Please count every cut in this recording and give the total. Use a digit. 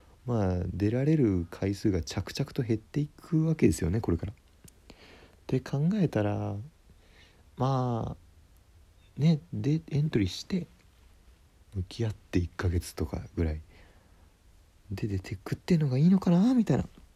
0